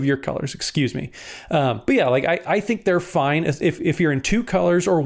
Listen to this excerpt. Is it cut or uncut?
uncut